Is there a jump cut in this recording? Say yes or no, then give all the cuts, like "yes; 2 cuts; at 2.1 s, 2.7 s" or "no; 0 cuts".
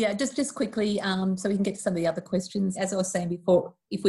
yes; 1 cut; at 2.7 s